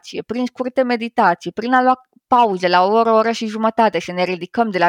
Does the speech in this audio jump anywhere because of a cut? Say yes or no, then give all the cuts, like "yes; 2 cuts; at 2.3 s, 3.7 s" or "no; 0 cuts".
no; 0 cuts